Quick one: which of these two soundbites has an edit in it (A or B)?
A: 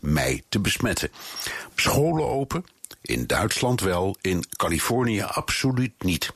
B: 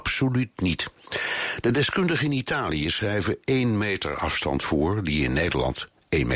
A